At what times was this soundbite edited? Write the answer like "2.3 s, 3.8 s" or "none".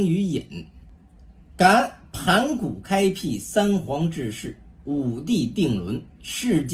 none